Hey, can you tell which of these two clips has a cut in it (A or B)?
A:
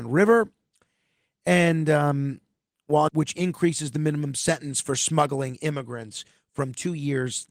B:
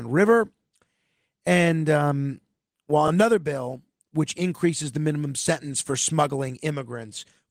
A